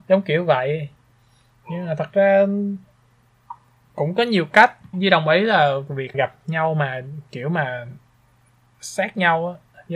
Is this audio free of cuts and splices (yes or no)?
no